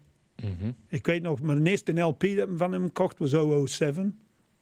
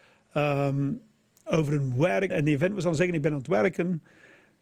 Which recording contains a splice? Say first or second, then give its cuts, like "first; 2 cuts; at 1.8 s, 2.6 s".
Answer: second; 1 cut; at 2.3 s